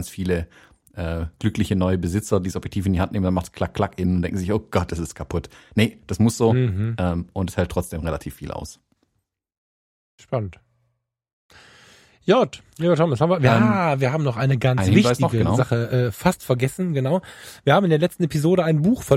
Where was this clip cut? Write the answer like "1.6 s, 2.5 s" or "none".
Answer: none